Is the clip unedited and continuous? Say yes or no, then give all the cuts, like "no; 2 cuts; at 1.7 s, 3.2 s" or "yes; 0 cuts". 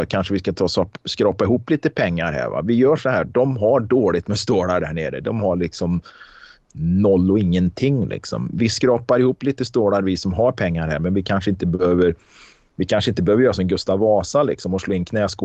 yes; 0 cuts